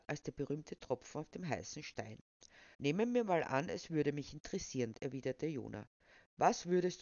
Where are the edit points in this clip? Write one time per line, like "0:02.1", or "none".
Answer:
0:02.7
0:04.9